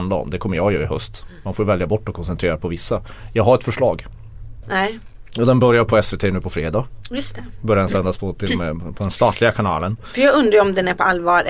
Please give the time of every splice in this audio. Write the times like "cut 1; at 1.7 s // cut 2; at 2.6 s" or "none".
cut 1; at 4.6 s